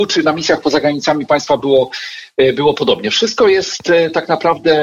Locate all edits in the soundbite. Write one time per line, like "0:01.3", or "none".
none